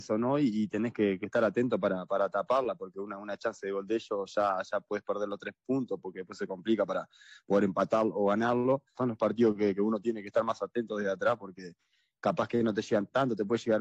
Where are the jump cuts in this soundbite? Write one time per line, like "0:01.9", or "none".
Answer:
0:09.0